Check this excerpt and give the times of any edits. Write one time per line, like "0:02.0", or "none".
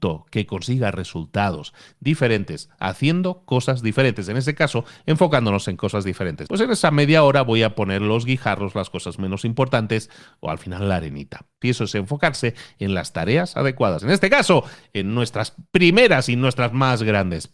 0:06.5
0:11.6
0:14.0

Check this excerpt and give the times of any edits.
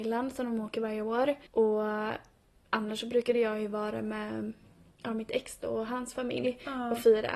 0:01.5

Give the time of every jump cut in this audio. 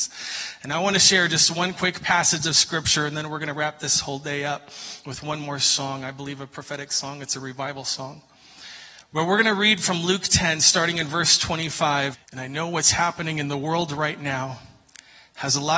0:12.1

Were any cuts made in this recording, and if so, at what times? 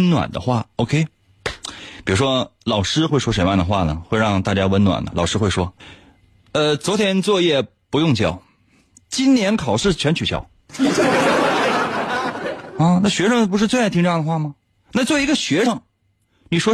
none

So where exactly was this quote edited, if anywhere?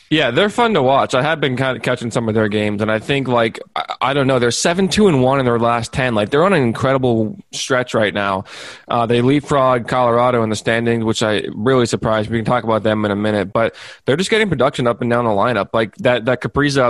none

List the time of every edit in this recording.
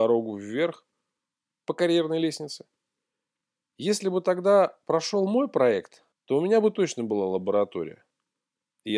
0:06.1

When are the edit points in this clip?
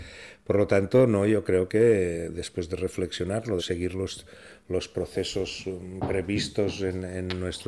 0:03.6

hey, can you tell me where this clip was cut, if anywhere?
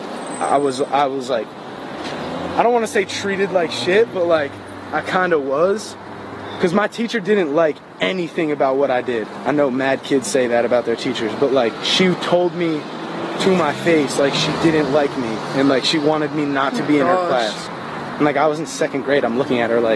none

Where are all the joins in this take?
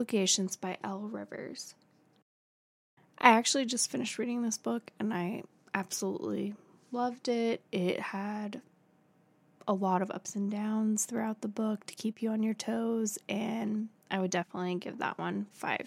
none

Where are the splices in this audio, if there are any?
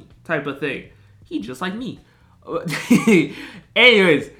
none

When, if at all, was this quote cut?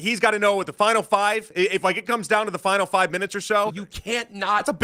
0:03.7

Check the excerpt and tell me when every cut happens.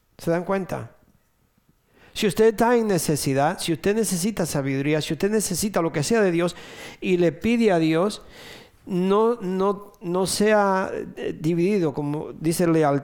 none

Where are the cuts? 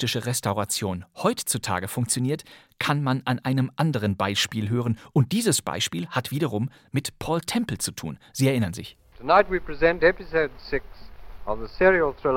0:09.1

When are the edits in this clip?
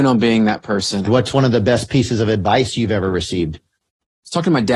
0:01.1

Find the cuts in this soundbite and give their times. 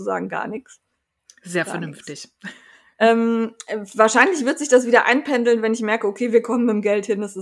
none

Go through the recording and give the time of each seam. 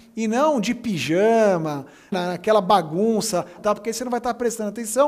0:02.1
0:03.6

